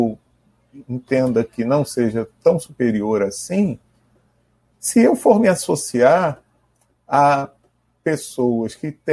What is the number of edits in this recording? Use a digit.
0